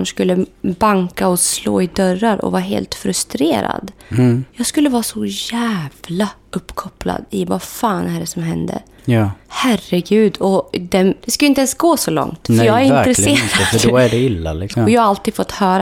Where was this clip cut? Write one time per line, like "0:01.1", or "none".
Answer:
0:11.2
0:14.7

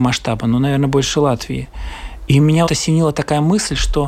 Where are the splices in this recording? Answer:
0:02.7

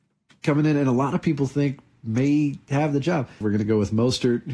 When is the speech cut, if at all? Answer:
0:03.4

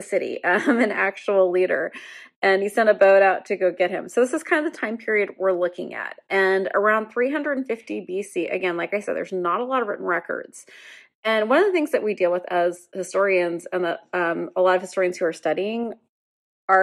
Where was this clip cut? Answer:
none

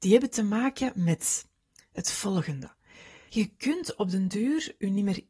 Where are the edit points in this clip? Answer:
0:03.3

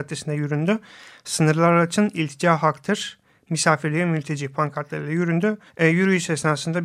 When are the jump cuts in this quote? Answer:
0:05.7

